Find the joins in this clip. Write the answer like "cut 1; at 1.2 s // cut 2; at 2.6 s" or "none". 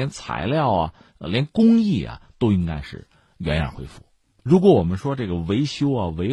cut 1; at 4.3 s